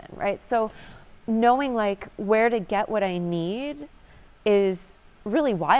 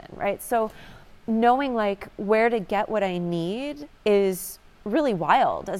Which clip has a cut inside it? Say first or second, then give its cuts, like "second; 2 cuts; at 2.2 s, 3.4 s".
second; 1 cut; at 4.0 s